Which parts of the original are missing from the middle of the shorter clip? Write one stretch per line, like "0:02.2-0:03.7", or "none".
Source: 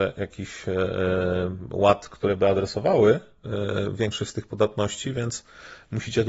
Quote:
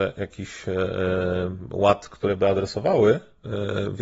none